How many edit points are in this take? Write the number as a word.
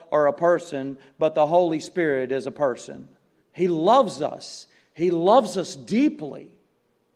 one